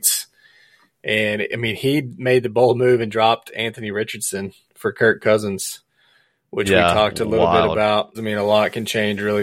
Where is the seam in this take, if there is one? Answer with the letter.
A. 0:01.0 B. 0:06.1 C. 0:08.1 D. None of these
C